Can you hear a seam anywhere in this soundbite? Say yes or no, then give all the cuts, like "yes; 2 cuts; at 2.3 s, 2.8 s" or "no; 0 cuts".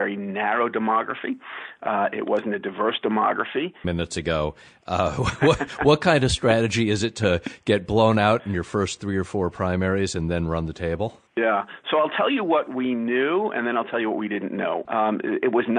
yes; 3 cuts; at 3.8 s, 11.3 s, 14.8 s